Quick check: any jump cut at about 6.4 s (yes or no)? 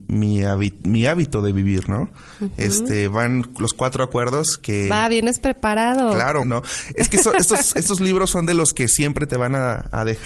yes